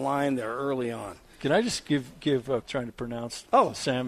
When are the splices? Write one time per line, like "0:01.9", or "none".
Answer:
0:02.6